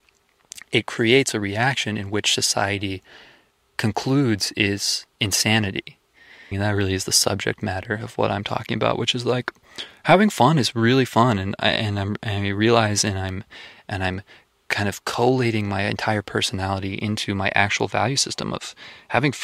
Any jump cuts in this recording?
yes; 1 cut; at 6.5 s

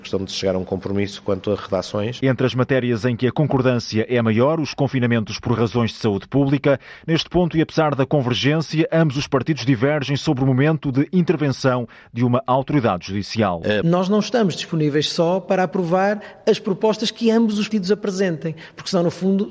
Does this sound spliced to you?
yes; 3 cuts; at 2.2 s, 13.8 s, 17.7 s

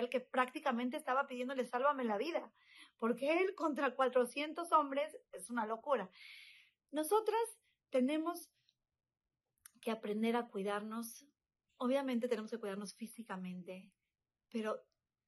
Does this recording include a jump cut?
no; 0 cuts

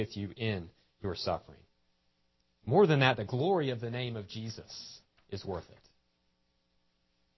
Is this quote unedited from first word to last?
yes; 0 cuts

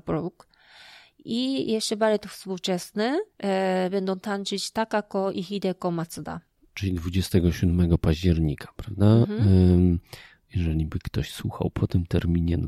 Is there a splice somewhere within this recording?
yes; 1 cut; at 3.3 s

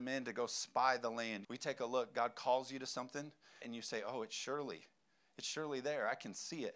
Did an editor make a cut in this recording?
yes; 2 cuts; at 1.4 s, 3.6 s

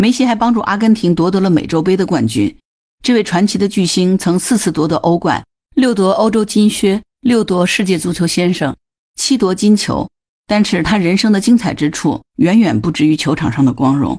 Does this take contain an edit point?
no; 0 cuts

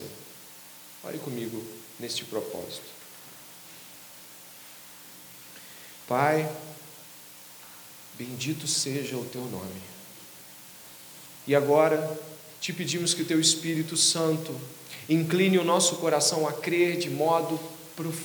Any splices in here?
yes; 1 cut; at 11.4 s

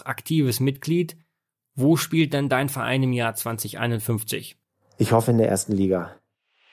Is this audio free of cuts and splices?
yes; 0 cuts

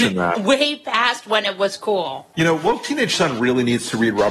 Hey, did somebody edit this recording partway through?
no; 0 cuts

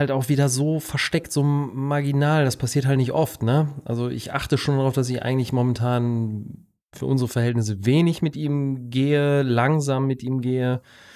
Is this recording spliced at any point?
no; 0 cuts

